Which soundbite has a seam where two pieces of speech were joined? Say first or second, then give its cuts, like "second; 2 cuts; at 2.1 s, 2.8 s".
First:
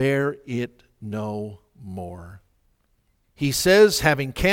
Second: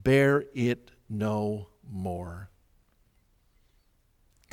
first; 1 cut; at 3.2 s